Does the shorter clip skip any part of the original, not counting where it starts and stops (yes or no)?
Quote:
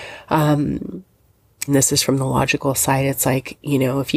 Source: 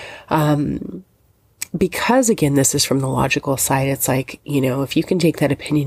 yes